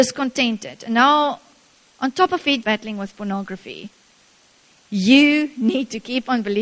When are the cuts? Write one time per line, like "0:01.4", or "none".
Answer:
0:02.6